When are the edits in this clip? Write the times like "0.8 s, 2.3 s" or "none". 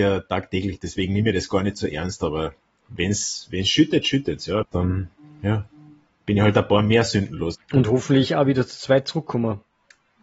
4.6 s, 7.5 s